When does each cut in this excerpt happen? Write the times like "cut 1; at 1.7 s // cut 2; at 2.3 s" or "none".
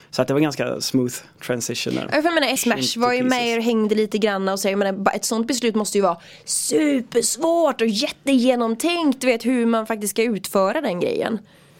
cut 1; at 2.6 s